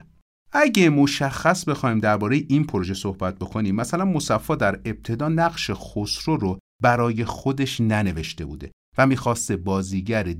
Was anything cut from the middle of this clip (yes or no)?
no